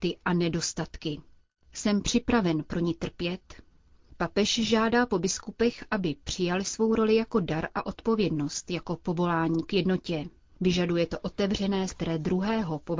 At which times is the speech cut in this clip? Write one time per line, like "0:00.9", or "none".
0:10.5
0:11.9